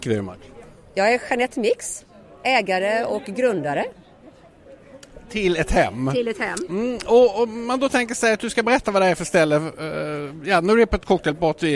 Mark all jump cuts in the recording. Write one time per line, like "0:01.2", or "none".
none